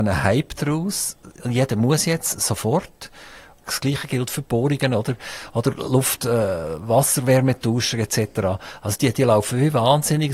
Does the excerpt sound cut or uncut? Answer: cut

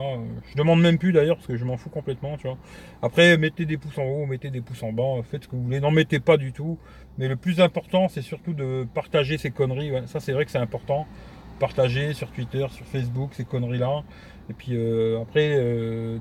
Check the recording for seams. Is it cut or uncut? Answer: uncut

